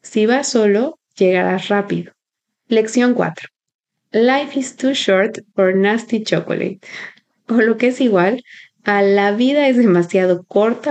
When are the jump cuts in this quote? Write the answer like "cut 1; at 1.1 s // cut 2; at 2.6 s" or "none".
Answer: cut 1; at 2.6 s